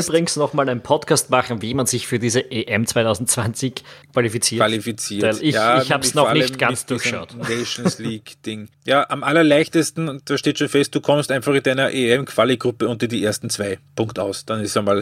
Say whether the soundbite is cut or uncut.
cut